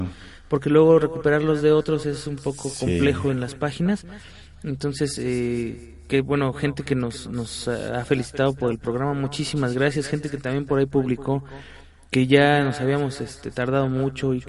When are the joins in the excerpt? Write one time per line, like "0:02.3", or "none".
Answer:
none